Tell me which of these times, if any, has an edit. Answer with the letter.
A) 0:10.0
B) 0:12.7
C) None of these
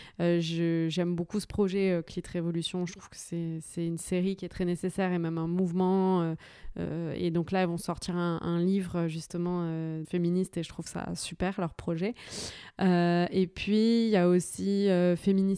A